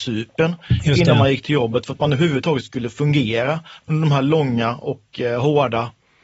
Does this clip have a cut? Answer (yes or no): no